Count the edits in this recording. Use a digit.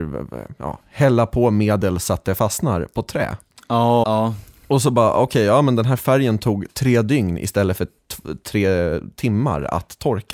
1